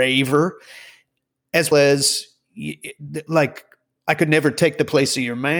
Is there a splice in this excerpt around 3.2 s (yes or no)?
no